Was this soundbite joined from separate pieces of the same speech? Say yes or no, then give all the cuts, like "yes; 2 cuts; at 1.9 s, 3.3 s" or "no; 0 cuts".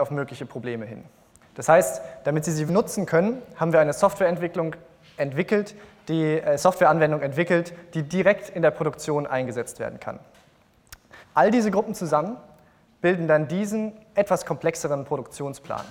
yes; 3 cuts; at 1.4 s, 2.7 s, 11.2 s